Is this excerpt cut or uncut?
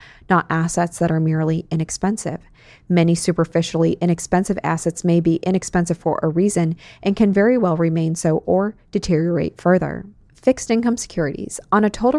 uncut